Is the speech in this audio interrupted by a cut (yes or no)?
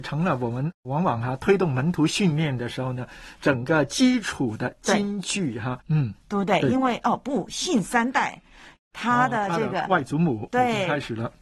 yes